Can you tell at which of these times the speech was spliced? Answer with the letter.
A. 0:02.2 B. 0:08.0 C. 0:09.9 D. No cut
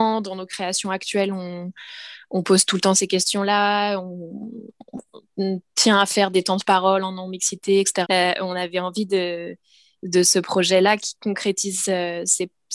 B